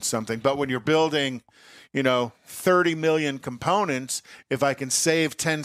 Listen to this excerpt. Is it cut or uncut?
uncut